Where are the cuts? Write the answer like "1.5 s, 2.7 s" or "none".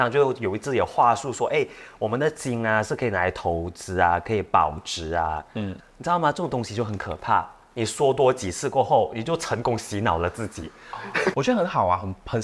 5.8 s, 11.3 s